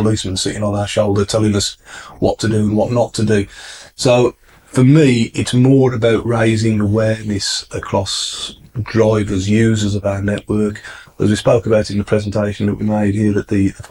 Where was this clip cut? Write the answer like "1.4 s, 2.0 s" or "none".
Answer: none